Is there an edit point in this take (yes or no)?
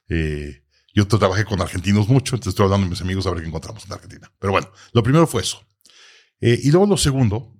no